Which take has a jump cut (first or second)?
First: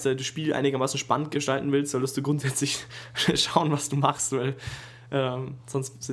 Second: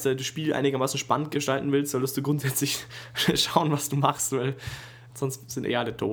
second